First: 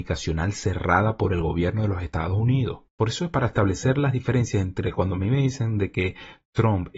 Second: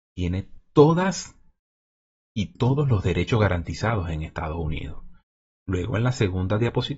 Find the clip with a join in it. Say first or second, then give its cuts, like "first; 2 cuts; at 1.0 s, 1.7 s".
first; 1 cut; at 2.9 s